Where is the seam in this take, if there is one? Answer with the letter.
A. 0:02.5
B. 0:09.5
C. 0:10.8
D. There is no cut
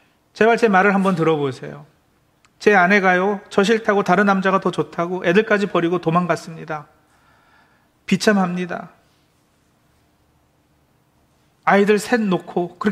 D